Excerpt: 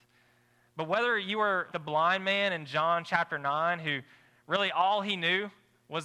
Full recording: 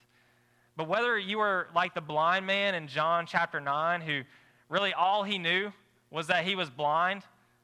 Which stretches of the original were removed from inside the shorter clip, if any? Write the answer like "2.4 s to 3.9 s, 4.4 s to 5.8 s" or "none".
1.7 s to 1.9 s

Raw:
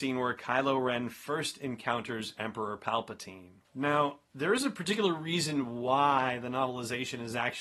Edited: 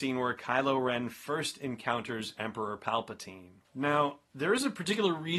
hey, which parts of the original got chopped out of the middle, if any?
none

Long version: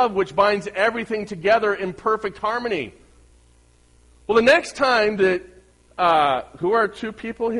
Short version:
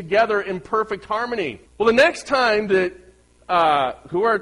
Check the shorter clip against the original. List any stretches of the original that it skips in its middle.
3.0 s to 4.2 s

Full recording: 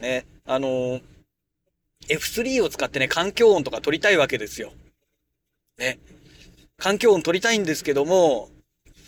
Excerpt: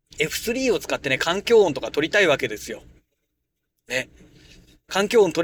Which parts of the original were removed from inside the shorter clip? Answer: none

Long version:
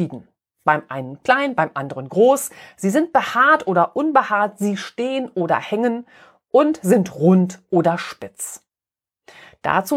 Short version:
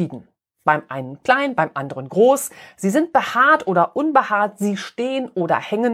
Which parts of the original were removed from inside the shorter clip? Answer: none

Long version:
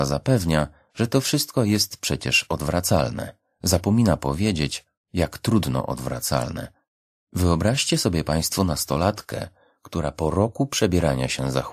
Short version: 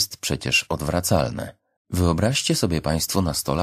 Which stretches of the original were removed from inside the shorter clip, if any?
3.6 s to 7.2 s

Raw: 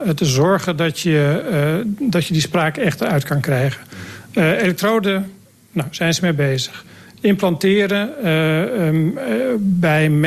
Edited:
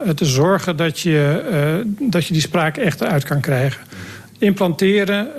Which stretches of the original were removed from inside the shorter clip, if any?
4.3 s to 7.1 s

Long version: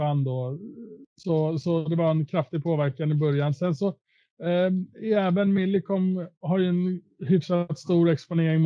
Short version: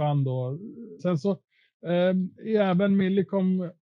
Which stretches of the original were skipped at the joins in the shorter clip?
1.0 s to 3.6 s

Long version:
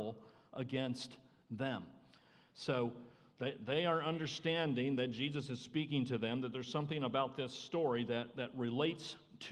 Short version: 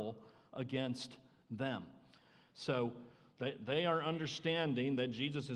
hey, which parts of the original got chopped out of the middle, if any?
none

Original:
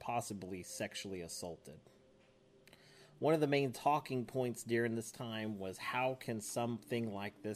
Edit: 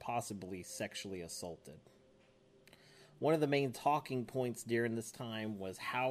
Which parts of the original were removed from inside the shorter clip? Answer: none

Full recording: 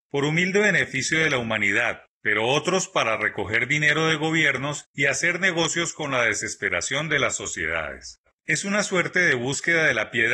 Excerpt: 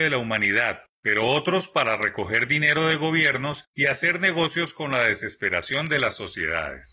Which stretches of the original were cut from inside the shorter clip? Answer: none

